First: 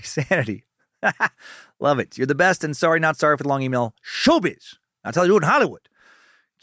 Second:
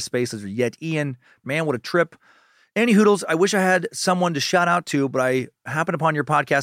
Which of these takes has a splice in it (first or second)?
second